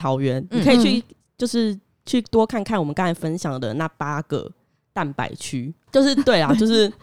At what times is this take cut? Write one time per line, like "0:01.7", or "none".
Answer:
0:05.9